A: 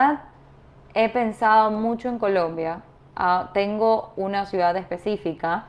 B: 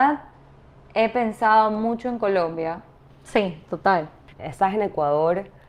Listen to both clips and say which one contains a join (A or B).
B